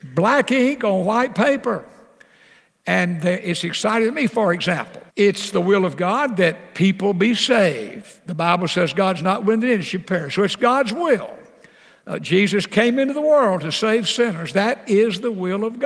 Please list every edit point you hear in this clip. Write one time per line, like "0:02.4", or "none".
0:05.1